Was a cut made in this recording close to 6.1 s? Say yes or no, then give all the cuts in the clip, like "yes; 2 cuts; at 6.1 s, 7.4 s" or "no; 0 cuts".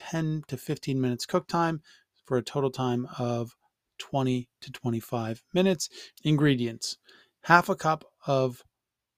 yes; 1 cut; at 6.1 s